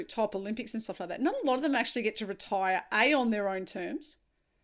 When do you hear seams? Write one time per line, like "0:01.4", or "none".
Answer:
none

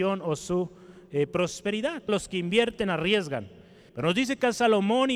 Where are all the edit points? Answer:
0:02.1
0:03.9

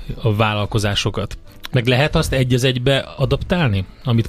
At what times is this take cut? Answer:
0:01.7
0:03.2

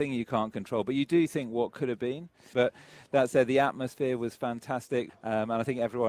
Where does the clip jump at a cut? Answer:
0:02.5
0:05.1

